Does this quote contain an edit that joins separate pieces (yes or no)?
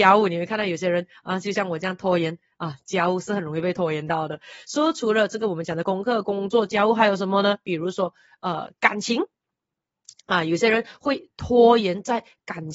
no